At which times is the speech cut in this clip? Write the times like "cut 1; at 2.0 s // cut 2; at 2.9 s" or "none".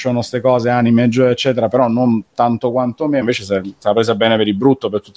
cut 1; at 3.2 s